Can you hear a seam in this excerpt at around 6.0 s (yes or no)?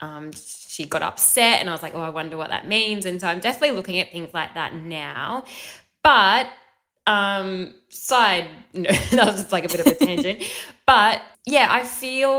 no